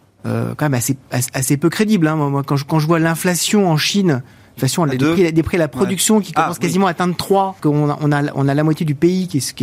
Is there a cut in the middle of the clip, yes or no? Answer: yes